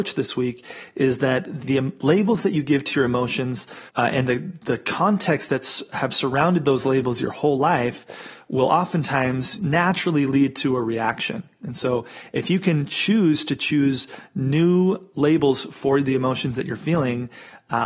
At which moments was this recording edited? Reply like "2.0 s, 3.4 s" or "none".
1.6 s, 3.9 s, 9.6 s